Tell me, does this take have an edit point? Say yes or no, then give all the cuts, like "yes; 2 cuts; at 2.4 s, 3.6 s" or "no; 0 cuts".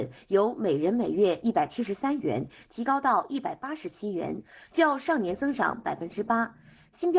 no; 0 cuts